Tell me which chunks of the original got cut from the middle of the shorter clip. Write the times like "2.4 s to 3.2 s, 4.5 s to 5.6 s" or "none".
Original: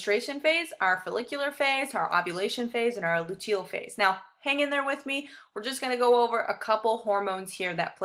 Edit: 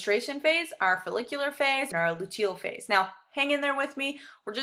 1.9 s to 3.0 s